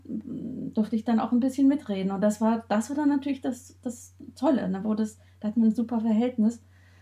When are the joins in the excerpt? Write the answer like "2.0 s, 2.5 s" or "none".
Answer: none